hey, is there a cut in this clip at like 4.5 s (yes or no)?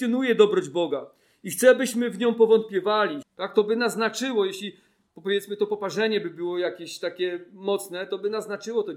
no